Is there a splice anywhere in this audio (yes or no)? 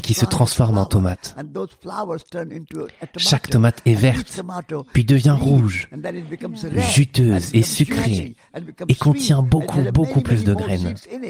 no